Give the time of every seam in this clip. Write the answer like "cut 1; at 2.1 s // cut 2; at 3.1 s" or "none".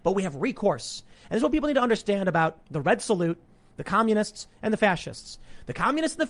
cut 1; at 1.1 s